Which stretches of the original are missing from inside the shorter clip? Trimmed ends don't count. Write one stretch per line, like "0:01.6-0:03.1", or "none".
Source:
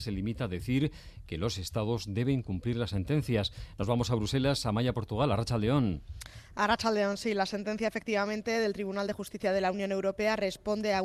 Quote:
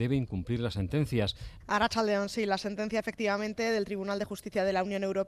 0:03.8-0:06.5